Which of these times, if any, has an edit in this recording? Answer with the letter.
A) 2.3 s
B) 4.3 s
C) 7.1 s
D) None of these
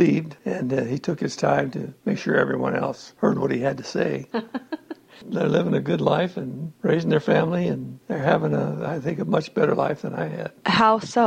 B